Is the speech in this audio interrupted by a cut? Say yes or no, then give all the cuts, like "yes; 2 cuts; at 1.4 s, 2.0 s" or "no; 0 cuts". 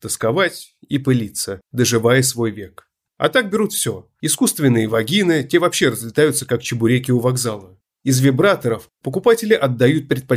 no; 0 cuts